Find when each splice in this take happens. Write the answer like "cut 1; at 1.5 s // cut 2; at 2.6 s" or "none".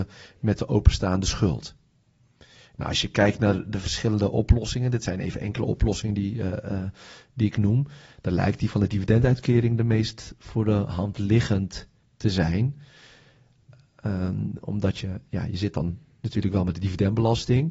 none